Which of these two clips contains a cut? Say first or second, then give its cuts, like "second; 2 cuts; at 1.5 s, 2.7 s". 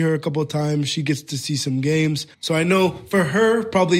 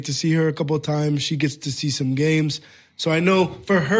first; 1 cut; at 2.3 s